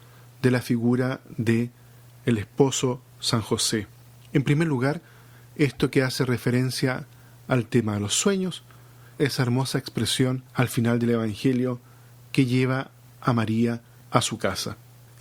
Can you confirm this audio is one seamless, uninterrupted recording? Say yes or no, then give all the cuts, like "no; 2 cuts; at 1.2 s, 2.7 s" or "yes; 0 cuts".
no; 2 cuts; at 9.2 s, 10.5 s